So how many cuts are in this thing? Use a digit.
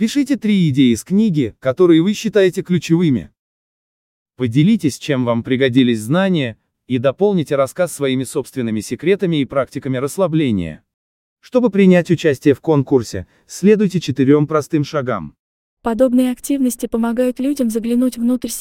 3